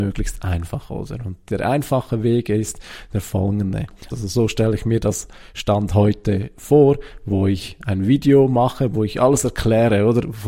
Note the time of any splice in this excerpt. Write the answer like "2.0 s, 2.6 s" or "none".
4.1 s